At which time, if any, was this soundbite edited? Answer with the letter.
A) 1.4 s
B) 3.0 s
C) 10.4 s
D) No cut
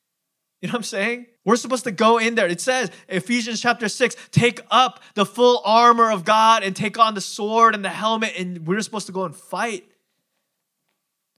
A